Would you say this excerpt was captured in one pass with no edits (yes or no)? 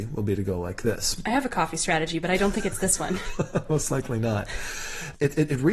yes